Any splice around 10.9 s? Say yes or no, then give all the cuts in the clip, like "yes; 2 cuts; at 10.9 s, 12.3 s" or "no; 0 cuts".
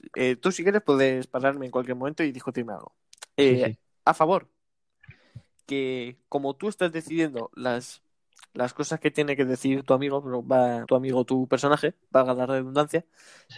yes; 1 cut; at 10.9 s